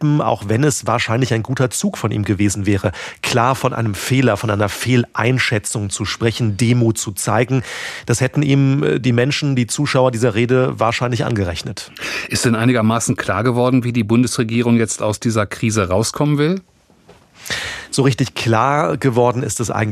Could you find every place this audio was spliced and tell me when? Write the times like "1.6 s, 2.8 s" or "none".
none

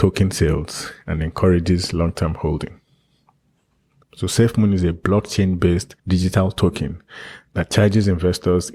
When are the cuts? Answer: 4.0 s, 6.0 s

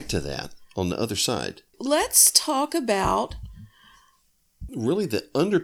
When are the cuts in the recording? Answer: 1.7 s, 4.7 s

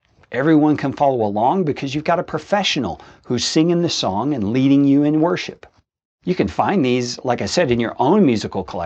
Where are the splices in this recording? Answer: none

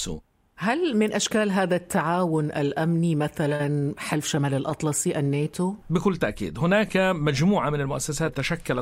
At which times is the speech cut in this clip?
5.8 s

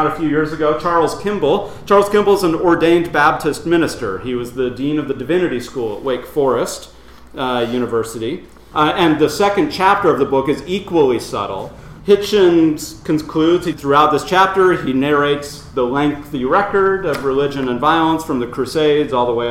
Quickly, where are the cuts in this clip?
8.7 s, 12.0 s, 13.7 s

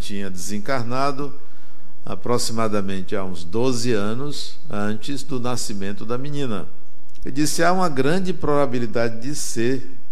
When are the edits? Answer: 7.2 s

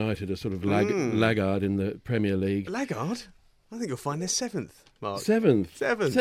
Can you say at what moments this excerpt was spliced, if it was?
none

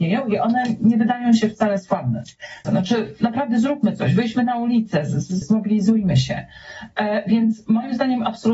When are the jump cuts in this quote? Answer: 2.6 s, 5.4 s

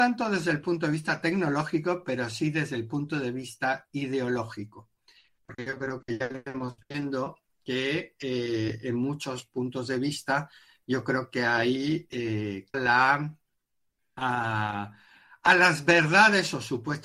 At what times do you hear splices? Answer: 12.7 s

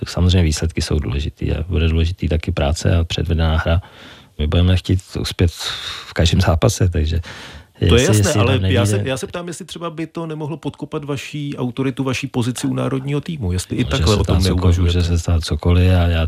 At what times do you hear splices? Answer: 4.4 s

